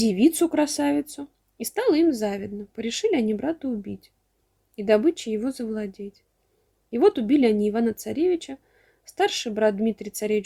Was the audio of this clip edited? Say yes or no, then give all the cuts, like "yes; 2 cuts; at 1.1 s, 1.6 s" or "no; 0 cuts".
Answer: no; 0 cuts